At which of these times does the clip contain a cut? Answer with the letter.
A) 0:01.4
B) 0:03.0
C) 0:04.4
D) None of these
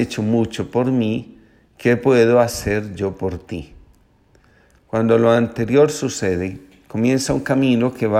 D